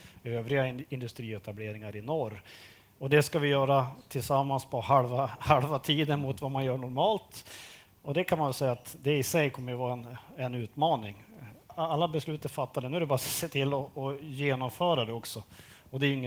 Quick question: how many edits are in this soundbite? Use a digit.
1